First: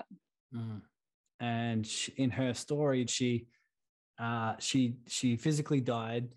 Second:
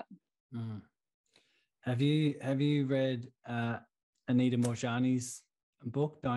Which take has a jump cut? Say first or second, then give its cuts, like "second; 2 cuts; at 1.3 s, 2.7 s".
first; 2 cuts; at 1.3 s, 3.1 s